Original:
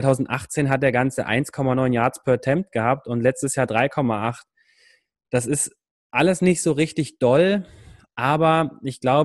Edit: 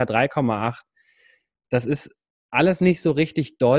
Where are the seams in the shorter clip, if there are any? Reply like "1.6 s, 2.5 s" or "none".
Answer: none